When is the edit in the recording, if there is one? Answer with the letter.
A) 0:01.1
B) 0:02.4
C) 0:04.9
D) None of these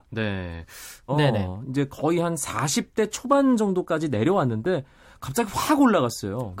A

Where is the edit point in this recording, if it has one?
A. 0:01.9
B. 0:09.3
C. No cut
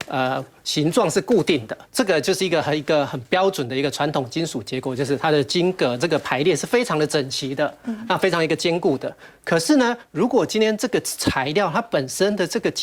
A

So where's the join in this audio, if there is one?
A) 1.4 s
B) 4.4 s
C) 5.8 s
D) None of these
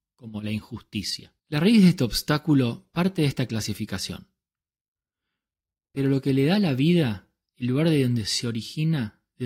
A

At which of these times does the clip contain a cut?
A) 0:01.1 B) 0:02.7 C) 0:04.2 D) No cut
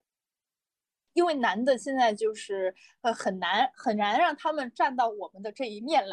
A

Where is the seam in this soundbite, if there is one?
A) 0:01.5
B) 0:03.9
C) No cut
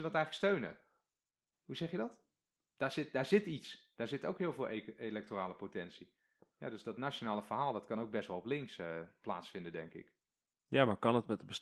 A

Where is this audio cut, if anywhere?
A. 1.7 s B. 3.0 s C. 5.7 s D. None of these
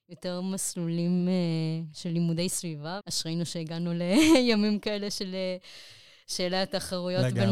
B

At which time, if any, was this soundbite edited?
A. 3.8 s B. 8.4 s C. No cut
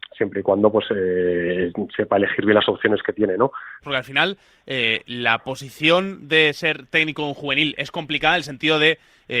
A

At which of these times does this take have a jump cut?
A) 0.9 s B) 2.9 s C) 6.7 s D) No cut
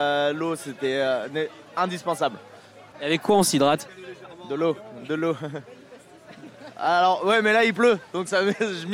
B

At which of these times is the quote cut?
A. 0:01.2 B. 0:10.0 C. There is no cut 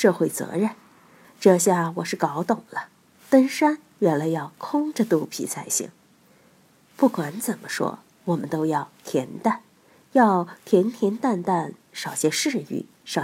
A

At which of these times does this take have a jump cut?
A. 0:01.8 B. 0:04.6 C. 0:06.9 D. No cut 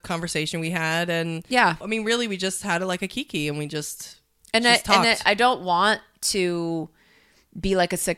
A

